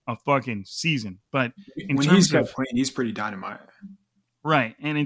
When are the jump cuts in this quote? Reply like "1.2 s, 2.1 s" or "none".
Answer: none

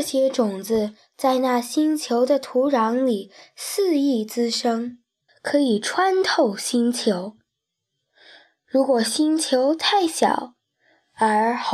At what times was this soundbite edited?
5.3 s

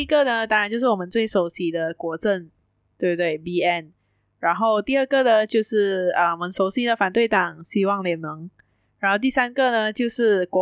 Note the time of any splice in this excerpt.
none

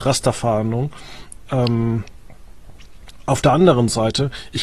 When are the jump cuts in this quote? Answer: none

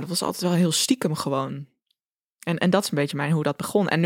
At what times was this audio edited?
none

